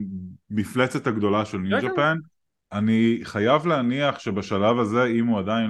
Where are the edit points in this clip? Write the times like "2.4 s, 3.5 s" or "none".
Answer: none